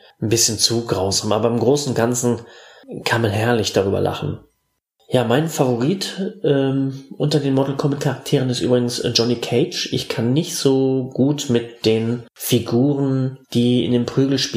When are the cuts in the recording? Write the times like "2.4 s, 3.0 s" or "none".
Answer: 13.4 s

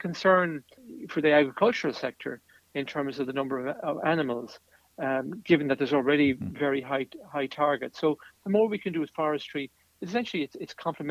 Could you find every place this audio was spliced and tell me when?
none

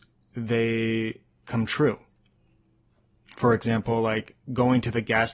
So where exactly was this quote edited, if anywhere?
none

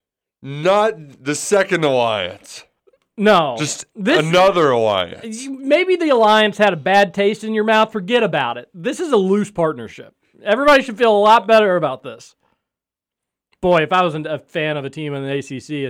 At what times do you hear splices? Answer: none

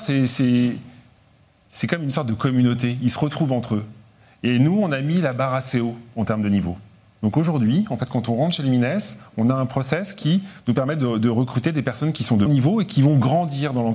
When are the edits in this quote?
12.5 s

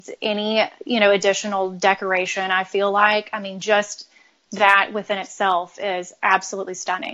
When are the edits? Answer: none

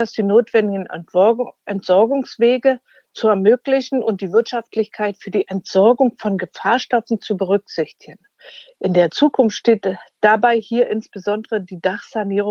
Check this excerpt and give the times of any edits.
8.7 s

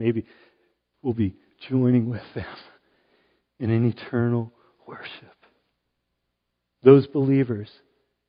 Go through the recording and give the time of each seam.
0.9 s

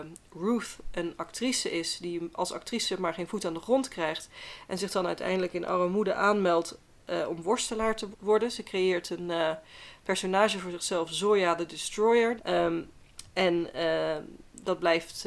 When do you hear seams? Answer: 8.1 s, 12.4 s

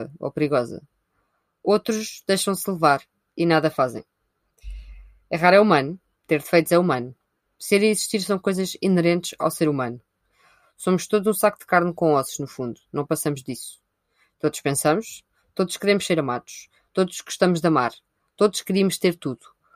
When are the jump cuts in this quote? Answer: none

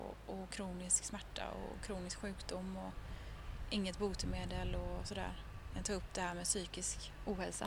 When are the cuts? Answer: none

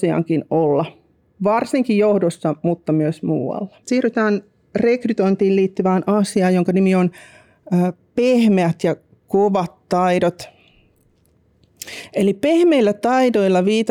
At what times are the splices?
3.8 s

